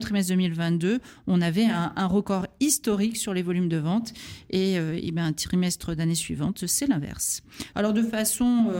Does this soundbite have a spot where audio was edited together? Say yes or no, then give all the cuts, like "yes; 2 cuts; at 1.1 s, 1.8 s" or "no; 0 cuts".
yes; 1 cut; at 7.7 s